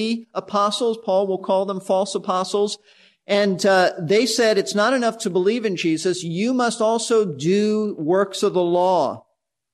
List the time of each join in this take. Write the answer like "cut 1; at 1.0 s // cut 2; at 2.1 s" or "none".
none